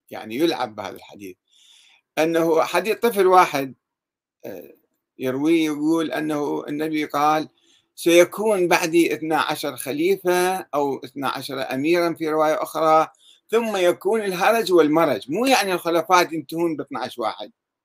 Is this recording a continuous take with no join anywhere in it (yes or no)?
no